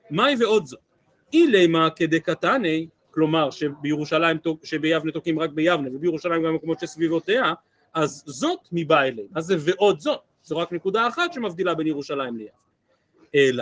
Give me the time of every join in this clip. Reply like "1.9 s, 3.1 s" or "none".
none